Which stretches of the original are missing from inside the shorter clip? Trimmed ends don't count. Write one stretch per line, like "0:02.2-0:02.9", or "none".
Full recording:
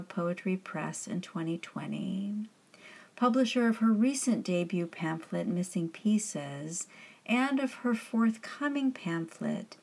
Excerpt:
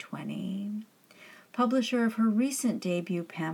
none